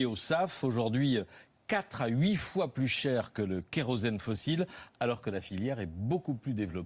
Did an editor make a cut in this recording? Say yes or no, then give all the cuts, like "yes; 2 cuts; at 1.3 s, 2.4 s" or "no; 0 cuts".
no; 0 cuts